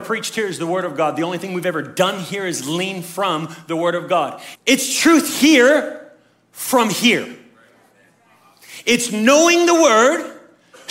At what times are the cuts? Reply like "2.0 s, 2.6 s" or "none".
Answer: 4.5 s